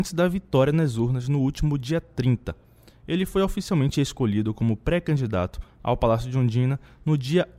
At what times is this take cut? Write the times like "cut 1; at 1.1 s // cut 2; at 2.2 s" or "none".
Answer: none